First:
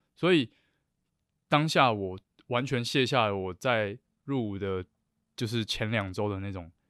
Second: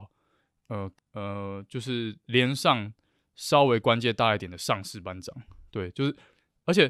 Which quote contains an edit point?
second; 1 cut; at 0.9 s

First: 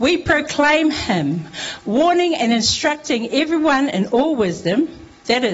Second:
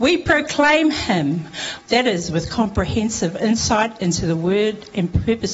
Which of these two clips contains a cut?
second; 1 cut; at 1.8 s

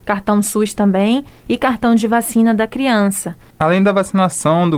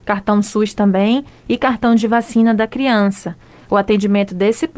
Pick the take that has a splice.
first; 1 cut; at 3.5 s

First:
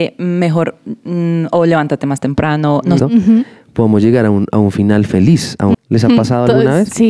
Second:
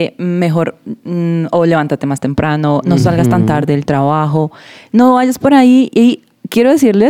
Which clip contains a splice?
first; 2 cuts; at 3.0 s, 5.7 s

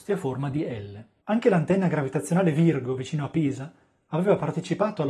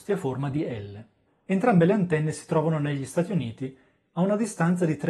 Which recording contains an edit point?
first; 1 cut; at 1.2 s

